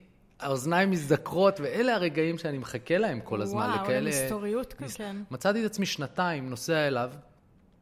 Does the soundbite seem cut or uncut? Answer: cut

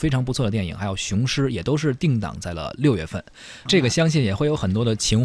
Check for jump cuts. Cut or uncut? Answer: cut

